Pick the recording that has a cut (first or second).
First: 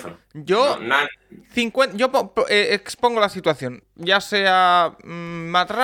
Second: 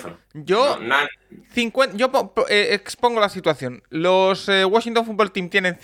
first